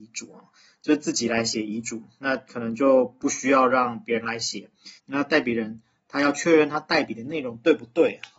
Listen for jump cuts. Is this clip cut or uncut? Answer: cut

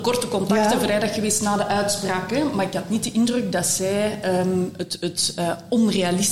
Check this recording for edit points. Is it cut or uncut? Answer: uncut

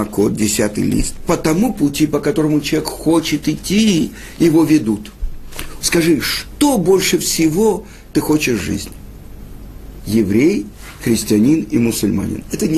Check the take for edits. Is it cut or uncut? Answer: cut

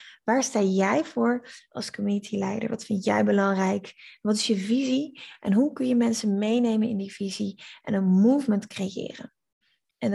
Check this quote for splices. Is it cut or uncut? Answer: uncut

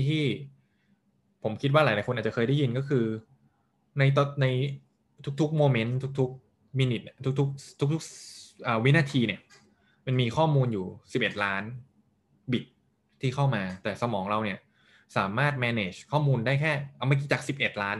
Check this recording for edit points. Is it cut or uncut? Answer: uncut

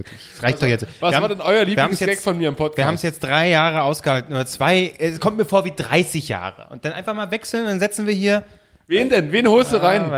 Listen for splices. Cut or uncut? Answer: uncut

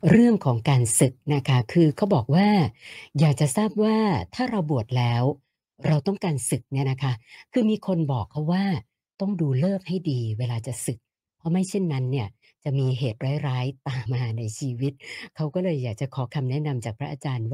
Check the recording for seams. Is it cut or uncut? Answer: cut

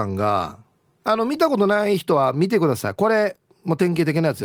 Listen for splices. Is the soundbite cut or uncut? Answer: cut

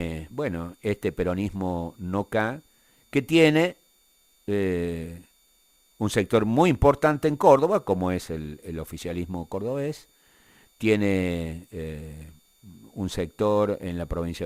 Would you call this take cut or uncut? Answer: uncut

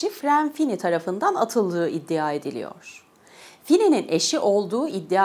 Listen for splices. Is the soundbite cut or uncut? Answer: uncut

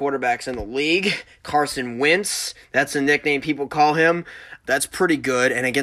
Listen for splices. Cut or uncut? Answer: cut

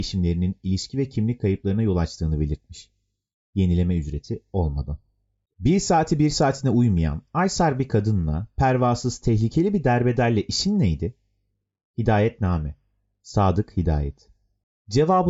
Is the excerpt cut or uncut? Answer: uncut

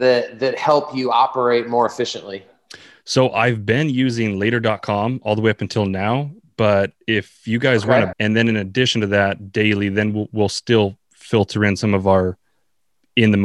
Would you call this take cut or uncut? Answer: cut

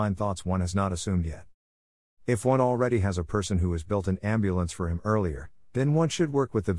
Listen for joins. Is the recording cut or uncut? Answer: uncut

